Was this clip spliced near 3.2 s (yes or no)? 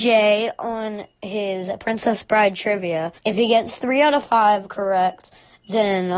yes